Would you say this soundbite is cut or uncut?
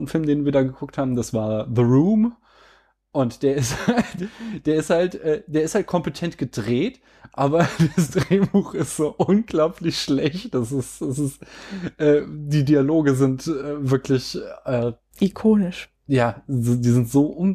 uncut